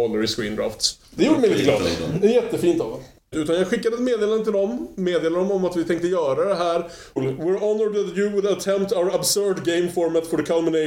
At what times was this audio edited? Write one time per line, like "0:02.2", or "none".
0:03.3
0:07.2